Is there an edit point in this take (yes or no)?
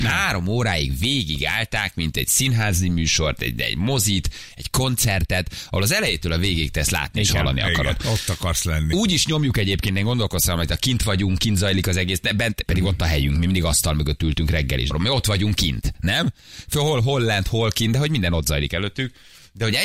yes